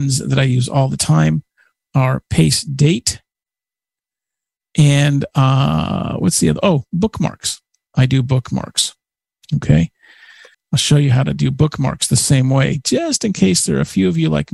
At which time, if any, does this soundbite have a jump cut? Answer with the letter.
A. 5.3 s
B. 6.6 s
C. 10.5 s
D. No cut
C